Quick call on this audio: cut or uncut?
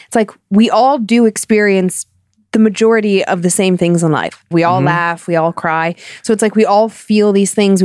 cut